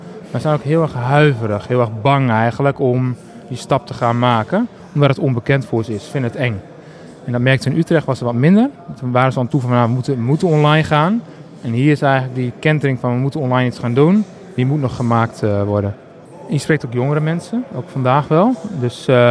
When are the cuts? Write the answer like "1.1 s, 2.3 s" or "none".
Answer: none